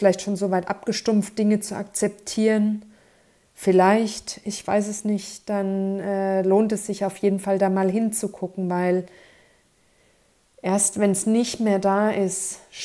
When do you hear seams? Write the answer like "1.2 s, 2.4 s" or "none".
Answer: none